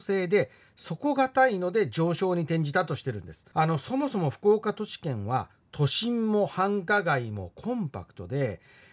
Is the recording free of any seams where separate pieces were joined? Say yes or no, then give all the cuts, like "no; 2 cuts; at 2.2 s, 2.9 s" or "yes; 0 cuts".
no; 1 cut; at 3.5 s